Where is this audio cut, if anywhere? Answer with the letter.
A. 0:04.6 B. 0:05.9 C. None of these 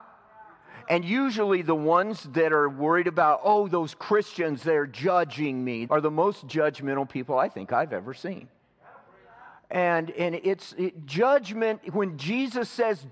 B